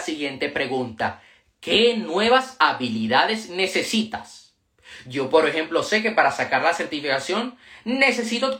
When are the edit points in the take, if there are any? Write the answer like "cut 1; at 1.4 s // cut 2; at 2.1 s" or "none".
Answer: none